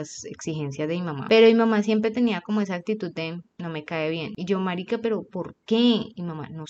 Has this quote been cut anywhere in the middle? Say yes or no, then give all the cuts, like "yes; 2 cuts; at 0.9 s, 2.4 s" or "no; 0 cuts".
no; 0 cuts